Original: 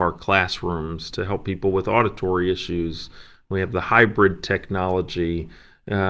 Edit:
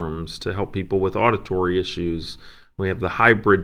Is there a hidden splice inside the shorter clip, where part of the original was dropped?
no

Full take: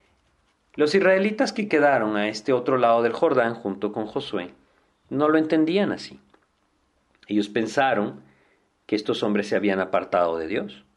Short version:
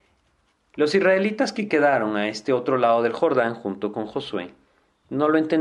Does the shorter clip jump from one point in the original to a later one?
no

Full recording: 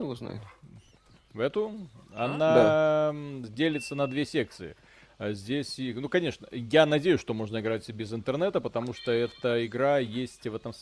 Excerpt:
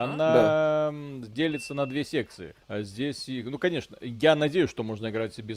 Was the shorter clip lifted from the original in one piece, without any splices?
no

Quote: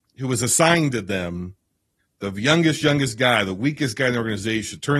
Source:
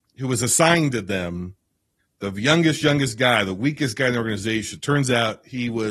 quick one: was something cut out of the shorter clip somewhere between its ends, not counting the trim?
no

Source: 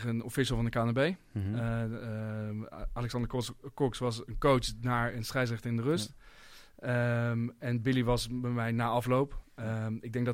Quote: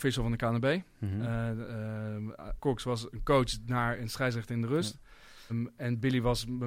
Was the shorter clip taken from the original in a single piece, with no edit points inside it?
no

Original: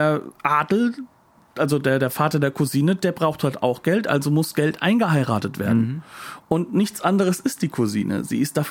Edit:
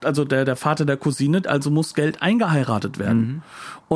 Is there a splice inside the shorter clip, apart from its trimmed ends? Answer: yes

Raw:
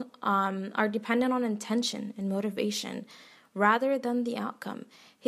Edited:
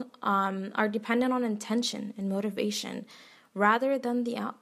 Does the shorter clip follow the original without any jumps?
yes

